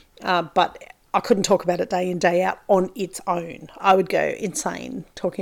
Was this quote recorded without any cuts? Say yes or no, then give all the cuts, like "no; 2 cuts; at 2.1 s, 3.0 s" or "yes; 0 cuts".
no; 1 cut; at 3.8 s